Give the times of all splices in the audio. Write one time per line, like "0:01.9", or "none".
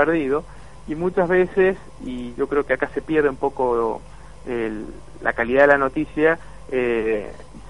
none